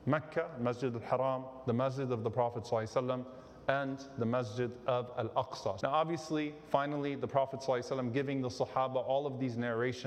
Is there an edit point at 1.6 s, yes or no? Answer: no